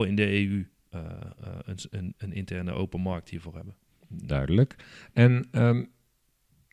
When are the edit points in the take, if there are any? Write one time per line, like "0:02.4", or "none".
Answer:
0:02.1

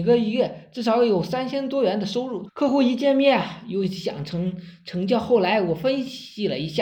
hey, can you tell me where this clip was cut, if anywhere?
0:02.5

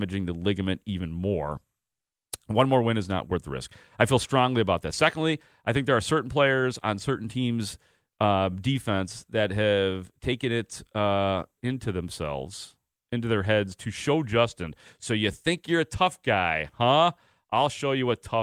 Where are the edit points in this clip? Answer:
none

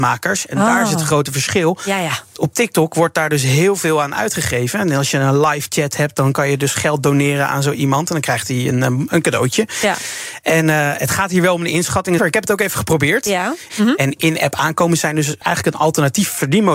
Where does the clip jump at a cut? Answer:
0:12.2
0:13.7
0:15.4

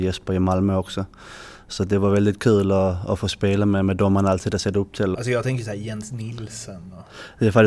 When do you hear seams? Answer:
0:05.1

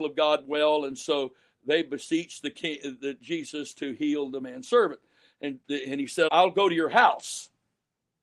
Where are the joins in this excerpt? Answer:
0:06.3

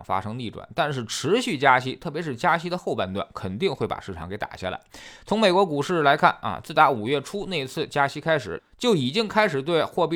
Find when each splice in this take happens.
none

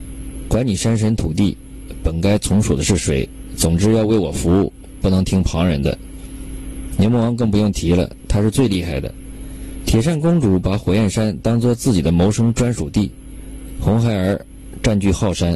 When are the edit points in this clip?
0:09.8

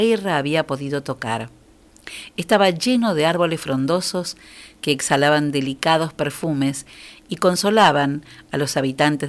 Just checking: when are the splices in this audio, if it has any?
none

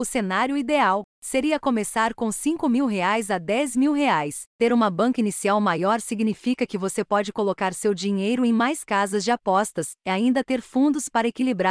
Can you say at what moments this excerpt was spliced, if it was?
0:01.1
0:04.5

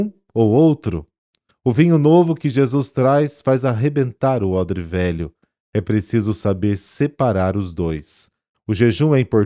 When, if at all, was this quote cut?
0:08.5

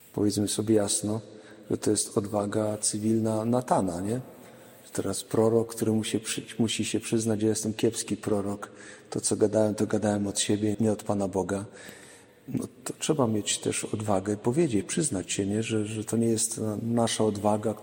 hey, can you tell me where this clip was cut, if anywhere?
0:10.7

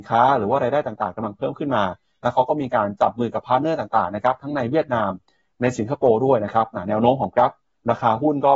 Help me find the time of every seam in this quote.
none

